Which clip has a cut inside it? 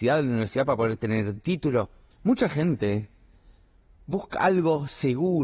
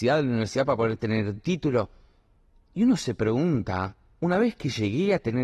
first; 1 cut; at 2.1 s

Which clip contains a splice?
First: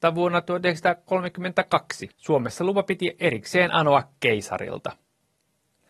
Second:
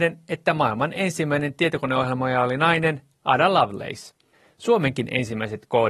first; 1 cut; at 2.1 s

